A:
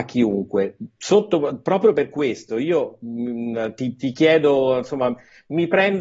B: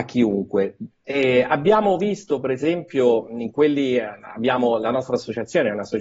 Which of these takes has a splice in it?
B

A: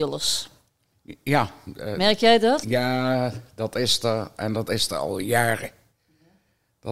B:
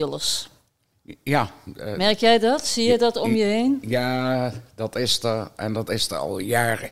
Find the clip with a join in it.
A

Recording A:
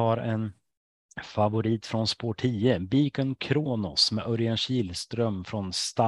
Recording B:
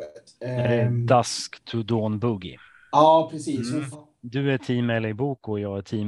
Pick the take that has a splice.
B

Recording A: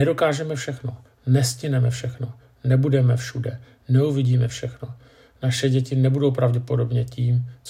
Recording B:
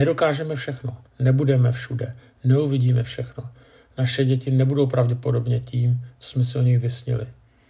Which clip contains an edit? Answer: B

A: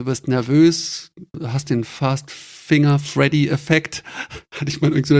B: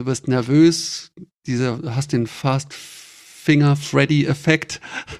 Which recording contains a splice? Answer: A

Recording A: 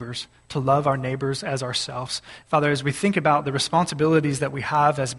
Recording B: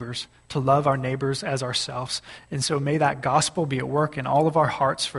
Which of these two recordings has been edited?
A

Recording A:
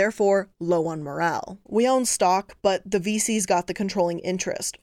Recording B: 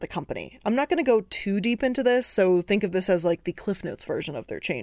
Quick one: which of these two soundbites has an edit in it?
A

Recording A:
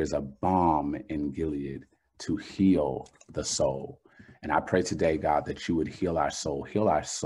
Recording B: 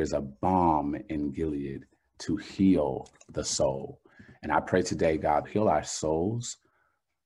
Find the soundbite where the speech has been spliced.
B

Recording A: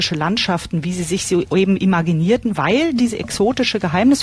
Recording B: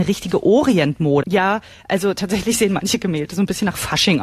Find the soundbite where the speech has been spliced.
B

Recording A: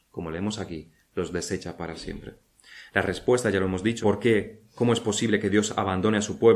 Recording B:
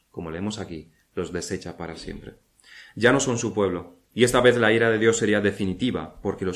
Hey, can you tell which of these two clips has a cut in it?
A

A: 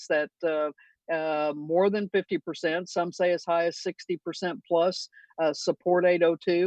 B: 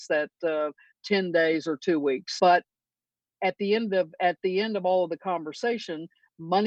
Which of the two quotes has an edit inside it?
B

